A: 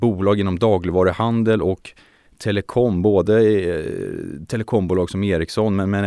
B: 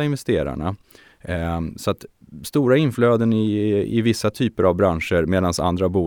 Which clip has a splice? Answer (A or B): B